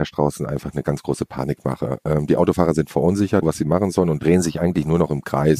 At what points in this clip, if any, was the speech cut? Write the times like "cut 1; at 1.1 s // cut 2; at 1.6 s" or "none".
cut 1; at 3.4 s